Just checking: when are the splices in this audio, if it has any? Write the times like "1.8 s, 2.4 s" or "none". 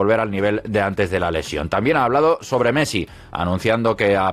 none